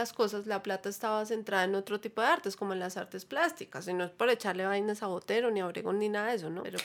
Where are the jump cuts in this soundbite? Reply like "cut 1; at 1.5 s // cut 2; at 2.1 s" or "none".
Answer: none